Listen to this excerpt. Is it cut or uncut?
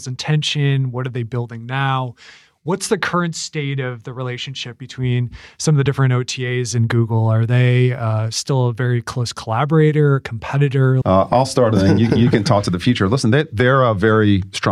cut